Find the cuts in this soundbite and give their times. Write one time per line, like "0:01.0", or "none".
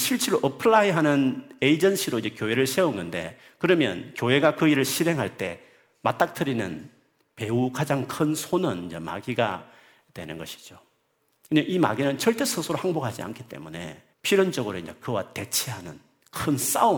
0:14.1